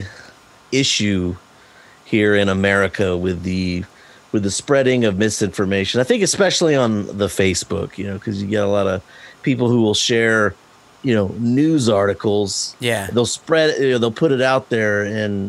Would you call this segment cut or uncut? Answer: uncut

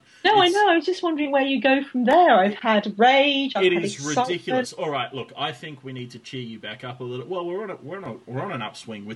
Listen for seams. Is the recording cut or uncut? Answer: uncut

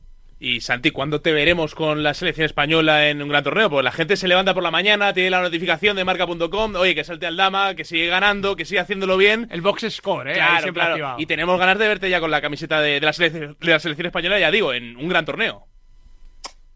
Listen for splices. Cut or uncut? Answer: uncut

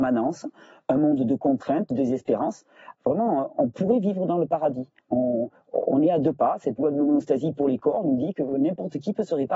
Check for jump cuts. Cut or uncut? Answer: cut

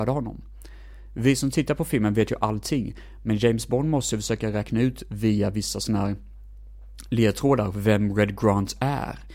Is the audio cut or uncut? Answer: uncut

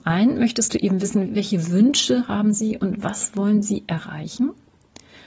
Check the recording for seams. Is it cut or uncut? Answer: cut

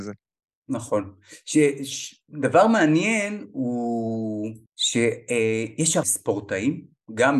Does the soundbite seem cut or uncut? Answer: cut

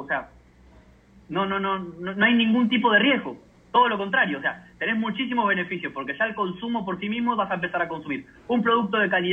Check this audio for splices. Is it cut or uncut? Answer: uncut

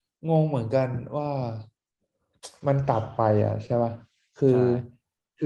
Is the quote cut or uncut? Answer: uncut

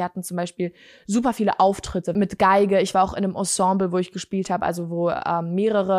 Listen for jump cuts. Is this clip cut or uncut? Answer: uncut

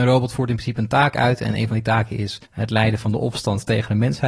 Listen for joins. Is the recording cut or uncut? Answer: cut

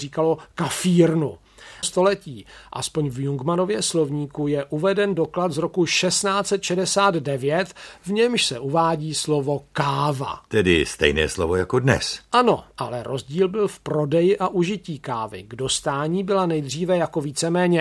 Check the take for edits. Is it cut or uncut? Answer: cut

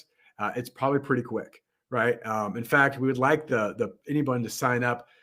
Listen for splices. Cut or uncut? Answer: uncut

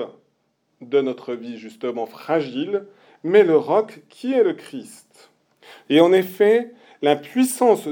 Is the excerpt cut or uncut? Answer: cut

